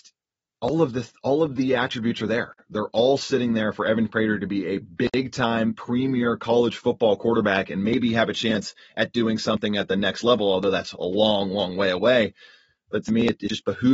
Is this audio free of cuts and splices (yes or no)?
yes